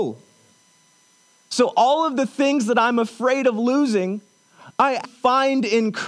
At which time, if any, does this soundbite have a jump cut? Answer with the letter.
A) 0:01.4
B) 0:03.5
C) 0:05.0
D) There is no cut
C